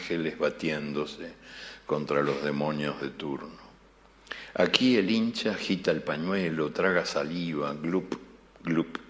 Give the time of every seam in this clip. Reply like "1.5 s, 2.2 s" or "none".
none